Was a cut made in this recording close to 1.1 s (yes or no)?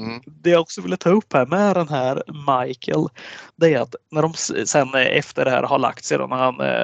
no